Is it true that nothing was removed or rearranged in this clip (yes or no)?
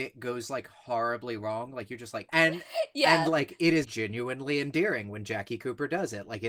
no